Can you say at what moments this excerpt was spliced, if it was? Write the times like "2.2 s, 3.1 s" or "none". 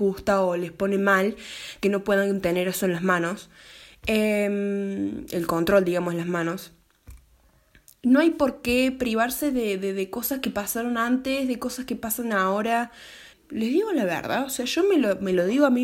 13.3 s